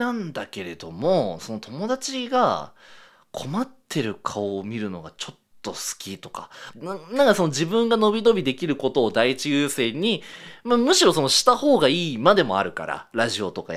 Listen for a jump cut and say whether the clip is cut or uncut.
cut